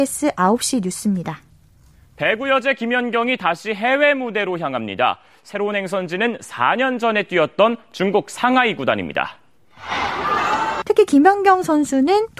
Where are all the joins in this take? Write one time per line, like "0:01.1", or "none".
0:10.8